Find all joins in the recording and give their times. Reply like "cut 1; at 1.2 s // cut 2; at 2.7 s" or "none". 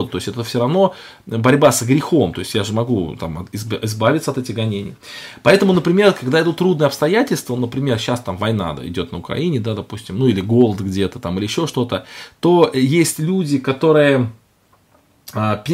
none